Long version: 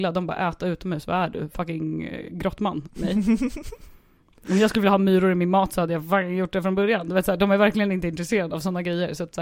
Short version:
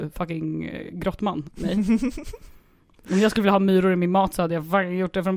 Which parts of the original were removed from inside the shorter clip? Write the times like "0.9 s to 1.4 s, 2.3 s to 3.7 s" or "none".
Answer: none